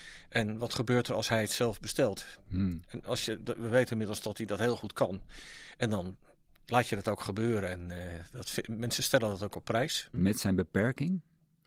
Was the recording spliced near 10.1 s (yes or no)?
yes